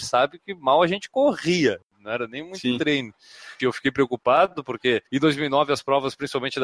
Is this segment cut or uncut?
cut